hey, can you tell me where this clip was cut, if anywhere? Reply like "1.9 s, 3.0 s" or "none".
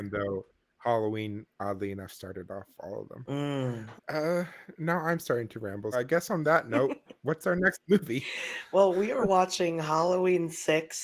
4.0 s, 5.9 s